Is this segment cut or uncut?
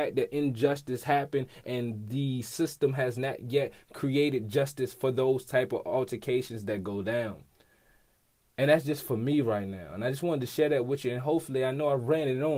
uncut